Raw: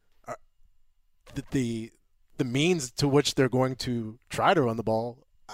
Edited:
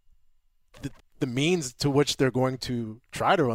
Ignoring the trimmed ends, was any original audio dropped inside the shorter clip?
yes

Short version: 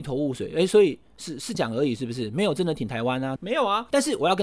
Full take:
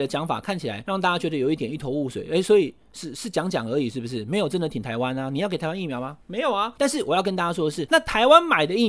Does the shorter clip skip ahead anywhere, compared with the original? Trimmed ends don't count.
yes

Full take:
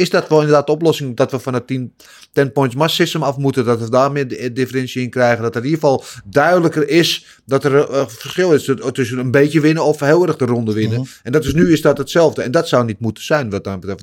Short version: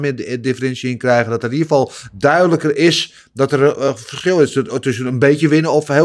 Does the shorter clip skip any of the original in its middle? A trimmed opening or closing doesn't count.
no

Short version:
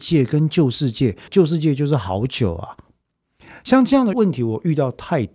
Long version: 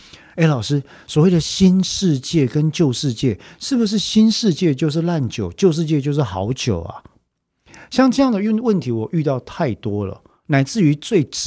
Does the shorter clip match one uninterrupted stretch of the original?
no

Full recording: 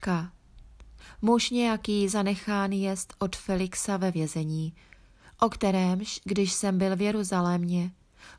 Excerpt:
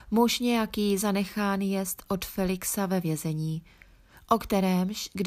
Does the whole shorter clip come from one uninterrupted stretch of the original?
yes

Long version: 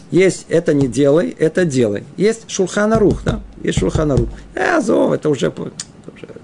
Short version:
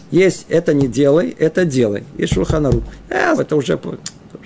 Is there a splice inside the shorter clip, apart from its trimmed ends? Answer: yes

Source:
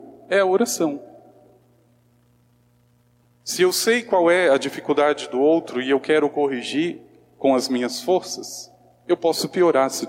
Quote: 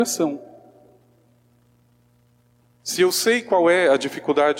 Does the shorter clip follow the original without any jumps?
yes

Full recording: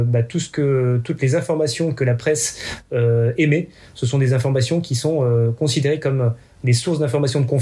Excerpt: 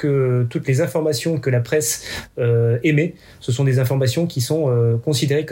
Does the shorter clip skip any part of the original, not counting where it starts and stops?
no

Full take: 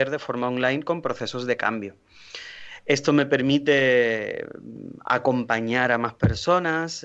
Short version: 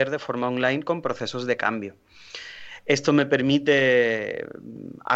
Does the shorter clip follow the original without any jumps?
yes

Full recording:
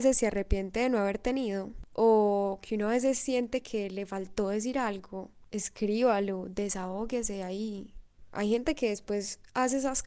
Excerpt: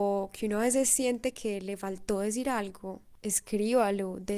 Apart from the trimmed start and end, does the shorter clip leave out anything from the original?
no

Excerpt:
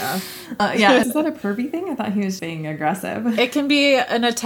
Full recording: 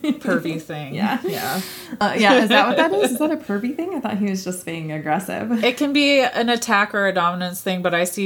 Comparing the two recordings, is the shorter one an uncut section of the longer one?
no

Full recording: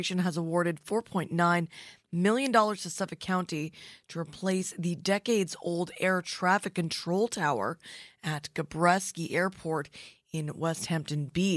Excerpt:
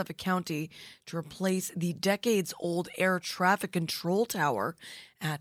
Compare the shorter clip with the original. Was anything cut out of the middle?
no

